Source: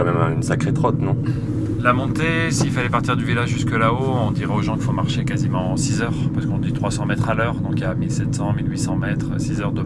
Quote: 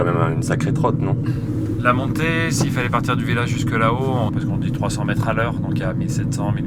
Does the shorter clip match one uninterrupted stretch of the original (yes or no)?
no